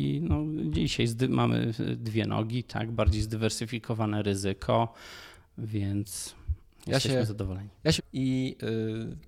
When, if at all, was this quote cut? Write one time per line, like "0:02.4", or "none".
0:08.0